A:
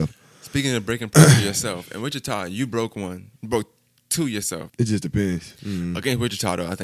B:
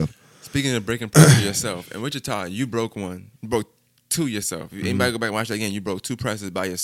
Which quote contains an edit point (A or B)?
A